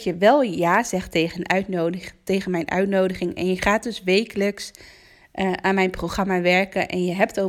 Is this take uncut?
yes; 0 cuts

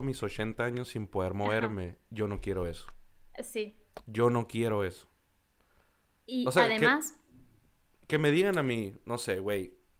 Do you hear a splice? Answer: no; 0 cuts

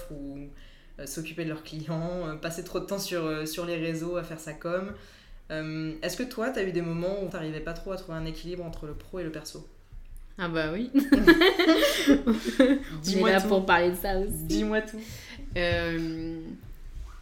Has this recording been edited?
yes; 1 cut; at 7.3 s

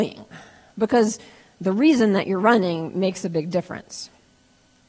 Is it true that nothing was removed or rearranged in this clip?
yes; 0 cuts

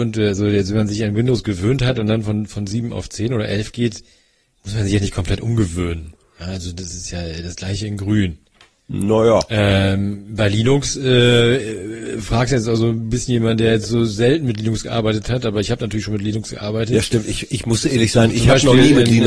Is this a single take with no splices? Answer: yes; 0 cuts

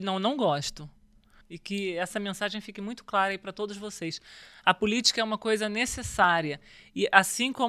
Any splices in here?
yes; 1 cut; at 1.4 s

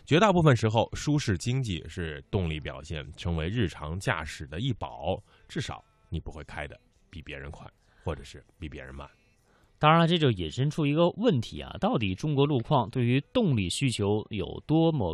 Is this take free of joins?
yes; 0 cuts

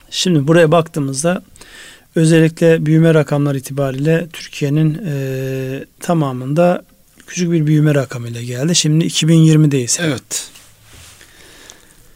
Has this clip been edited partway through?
yes; 2 cuts; at 6.0 s, 10.0 s

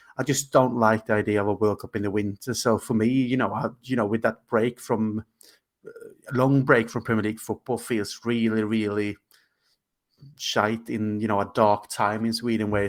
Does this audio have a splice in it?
no; 0 cuts

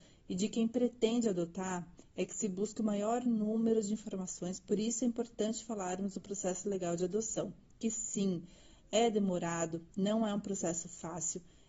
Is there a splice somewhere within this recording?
no; 0 cuts

